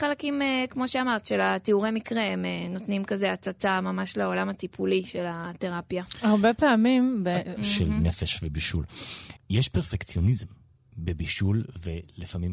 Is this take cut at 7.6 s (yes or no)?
yes